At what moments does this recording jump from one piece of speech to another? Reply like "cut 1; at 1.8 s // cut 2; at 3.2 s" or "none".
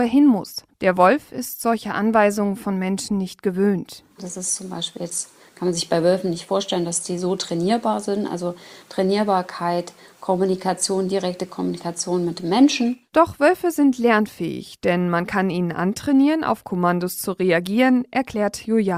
cut 1; at 4.2 s